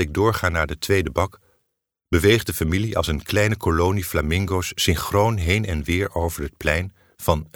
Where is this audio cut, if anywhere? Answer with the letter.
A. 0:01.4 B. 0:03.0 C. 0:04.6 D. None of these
D